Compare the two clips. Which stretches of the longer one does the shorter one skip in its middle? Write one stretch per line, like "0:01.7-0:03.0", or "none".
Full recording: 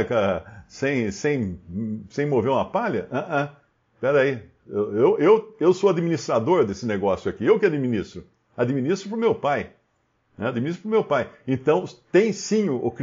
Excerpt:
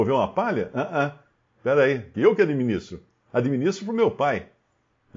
0:04.5-0:07.4